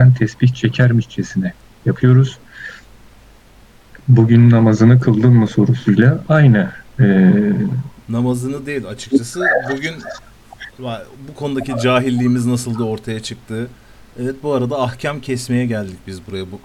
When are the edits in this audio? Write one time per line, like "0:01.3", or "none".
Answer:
none

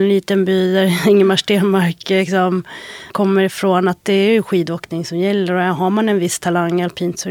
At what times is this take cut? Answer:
0:03.1

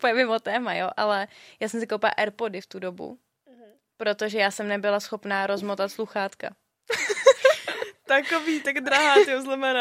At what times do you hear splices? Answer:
none

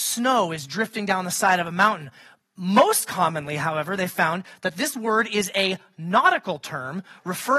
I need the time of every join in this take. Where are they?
none

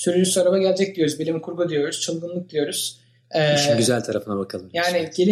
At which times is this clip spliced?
none

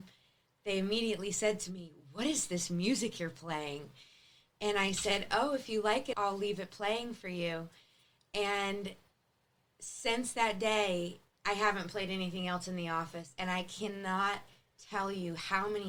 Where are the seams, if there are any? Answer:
0:06.1

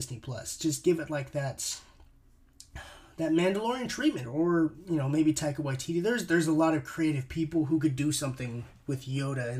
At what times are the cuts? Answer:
0:04.2

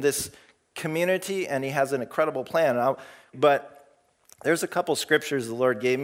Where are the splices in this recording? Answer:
0:03.3

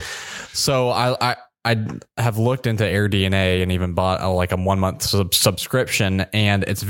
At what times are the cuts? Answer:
none

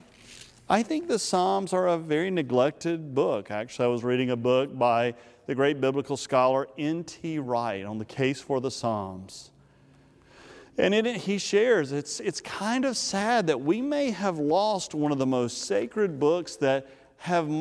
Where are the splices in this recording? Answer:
none

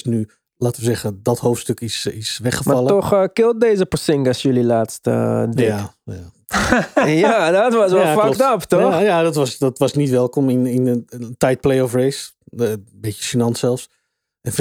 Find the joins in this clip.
none

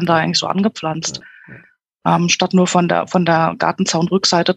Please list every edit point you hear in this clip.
none

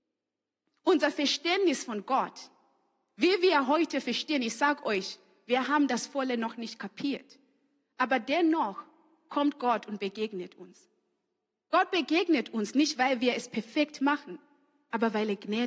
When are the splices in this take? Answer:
none

